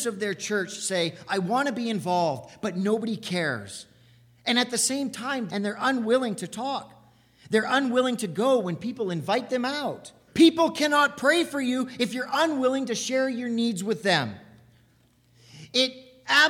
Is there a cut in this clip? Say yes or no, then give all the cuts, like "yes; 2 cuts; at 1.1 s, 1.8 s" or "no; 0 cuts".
yes; 2 cuts; at 5.5 s, 10.3 s